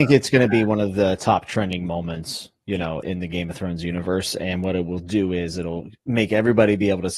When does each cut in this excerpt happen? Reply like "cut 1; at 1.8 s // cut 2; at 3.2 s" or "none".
cut 1; at 3.0 s